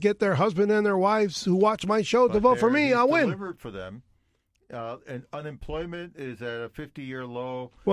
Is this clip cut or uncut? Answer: uncut